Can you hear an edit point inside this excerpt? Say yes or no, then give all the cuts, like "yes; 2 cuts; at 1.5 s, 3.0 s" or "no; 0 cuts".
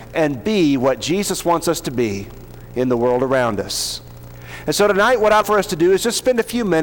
yes; 1 cut; at 5.4 s